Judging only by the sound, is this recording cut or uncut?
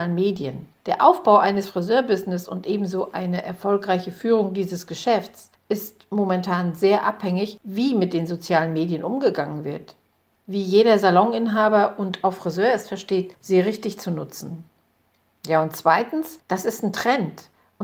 uncut